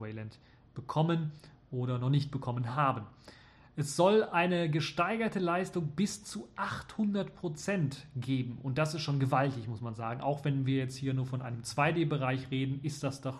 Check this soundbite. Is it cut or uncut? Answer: uncut